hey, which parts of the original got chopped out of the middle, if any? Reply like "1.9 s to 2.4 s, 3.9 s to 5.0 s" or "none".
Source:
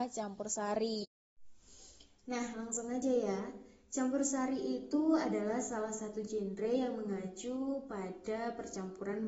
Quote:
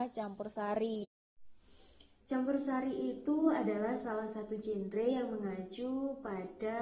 2.2 s to 3.9 s